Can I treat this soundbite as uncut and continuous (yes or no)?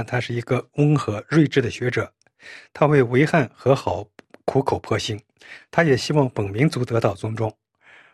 yes